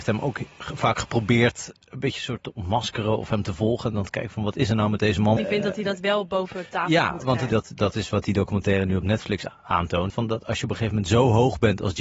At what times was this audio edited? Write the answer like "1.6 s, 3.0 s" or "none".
5.4 s, 7.5 s, 10.1 s